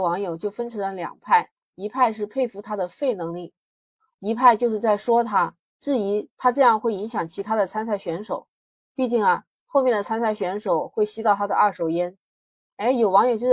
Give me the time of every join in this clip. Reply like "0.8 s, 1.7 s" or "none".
none